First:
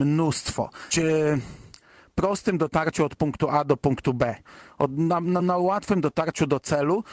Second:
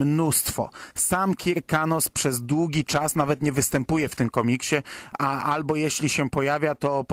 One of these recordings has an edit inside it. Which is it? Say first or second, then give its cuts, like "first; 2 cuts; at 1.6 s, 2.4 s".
first; 2 cuts; at 0.9 s, 5.4 s